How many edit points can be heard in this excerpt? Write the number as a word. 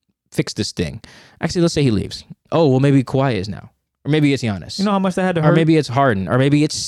one